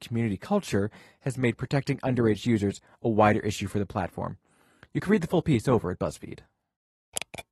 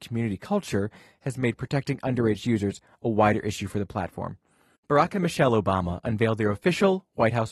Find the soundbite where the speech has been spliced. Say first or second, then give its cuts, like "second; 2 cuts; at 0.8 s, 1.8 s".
second; 1 cut; at 4.8 s